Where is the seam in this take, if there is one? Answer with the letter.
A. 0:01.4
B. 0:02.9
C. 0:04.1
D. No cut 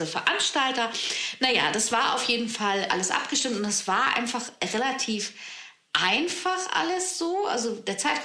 B